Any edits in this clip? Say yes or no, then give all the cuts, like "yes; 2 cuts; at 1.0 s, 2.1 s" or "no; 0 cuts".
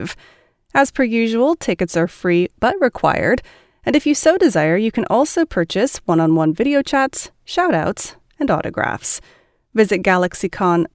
no; 0 cuts